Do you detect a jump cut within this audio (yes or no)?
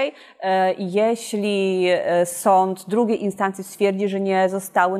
no